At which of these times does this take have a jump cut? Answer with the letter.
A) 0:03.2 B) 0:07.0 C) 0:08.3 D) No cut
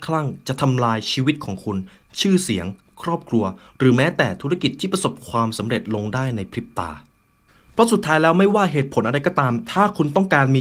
D